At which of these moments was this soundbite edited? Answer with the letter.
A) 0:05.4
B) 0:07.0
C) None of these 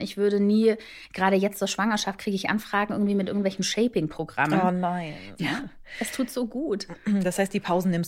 A